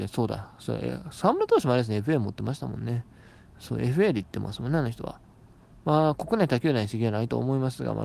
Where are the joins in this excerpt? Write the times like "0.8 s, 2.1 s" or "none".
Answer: none